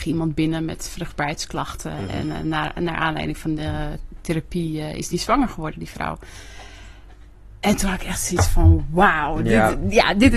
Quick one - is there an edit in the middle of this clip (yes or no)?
no